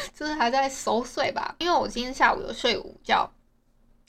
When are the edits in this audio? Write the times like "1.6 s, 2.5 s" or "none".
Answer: 1.6 s